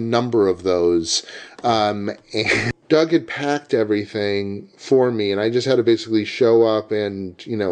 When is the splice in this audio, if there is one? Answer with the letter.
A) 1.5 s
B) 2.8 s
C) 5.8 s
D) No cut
B